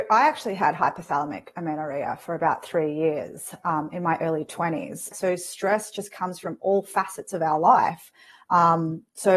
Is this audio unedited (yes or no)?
no